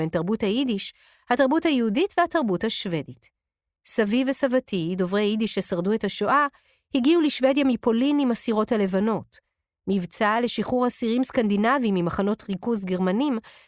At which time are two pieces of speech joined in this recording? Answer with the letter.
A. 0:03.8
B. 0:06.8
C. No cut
A